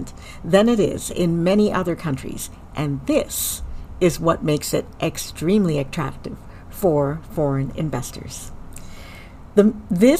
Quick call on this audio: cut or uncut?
uncut